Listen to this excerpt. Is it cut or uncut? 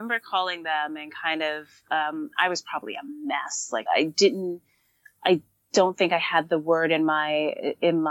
cut